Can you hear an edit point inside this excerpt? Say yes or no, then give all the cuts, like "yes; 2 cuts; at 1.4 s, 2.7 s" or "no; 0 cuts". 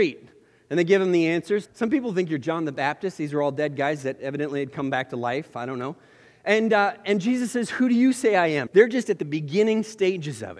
yes; 2 cuts; at 1.6 s, 8.7 s